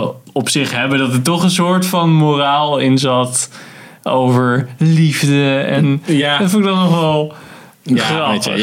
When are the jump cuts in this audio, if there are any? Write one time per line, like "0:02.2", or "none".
none